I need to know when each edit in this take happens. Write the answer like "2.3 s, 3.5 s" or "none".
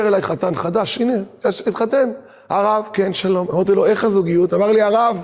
none